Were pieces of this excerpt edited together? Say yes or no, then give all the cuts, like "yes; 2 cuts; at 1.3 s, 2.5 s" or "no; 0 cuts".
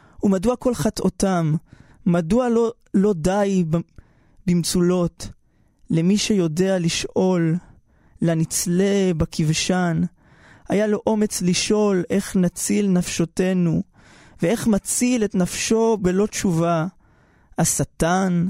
no; 0 cuts